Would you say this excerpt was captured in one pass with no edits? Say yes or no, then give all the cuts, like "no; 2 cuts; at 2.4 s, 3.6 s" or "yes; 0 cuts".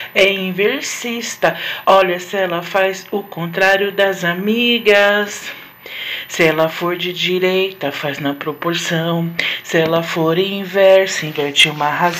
no; 1 cut; at 1.8 s